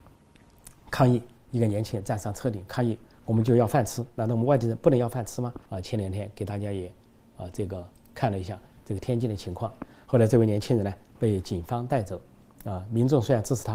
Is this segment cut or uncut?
cut